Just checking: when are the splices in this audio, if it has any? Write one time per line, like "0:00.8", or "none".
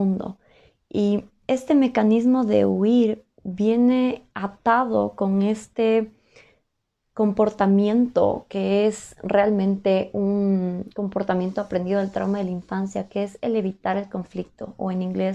none